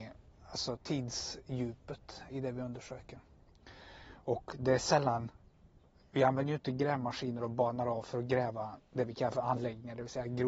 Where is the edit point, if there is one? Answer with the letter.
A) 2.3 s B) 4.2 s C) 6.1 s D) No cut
A